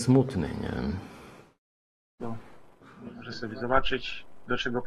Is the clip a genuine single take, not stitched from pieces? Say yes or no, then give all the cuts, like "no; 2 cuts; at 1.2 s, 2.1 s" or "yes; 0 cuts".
no; 1 cut; at 2.2 s